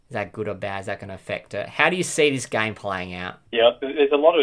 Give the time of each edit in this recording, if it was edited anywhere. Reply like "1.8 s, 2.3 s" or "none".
3.5 s